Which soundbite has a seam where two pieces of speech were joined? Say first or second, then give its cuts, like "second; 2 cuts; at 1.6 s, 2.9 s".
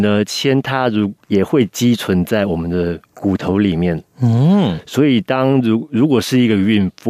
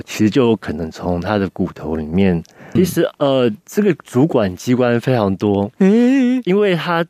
second; 1 cut; at 2.8 s